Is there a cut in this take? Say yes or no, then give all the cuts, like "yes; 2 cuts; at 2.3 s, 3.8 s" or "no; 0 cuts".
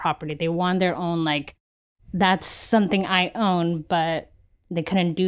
no; 0 cuts